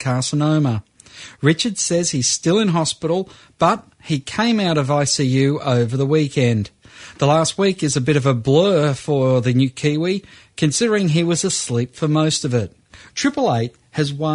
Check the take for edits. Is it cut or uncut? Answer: cut